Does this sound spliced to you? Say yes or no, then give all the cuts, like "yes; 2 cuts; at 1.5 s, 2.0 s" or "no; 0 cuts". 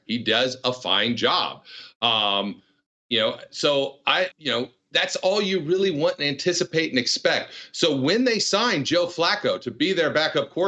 yes; 1 cut; at 4.3 s